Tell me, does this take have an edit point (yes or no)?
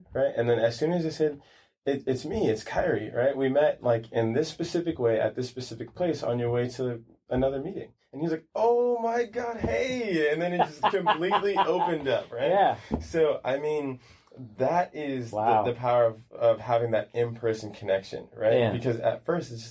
no